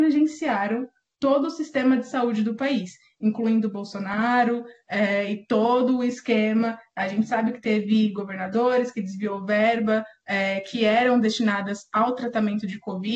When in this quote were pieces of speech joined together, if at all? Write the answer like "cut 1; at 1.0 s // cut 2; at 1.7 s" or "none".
none